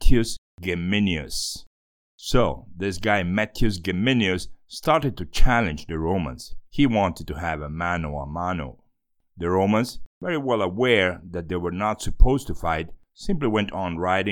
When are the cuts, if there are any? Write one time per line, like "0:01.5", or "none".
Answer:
0:06.7